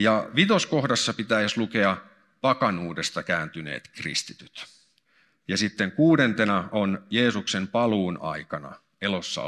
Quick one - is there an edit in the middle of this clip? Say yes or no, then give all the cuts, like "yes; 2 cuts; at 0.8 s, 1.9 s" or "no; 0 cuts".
no; 0 cuts